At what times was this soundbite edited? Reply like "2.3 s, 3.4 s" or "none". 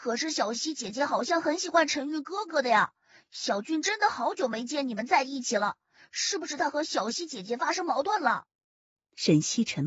none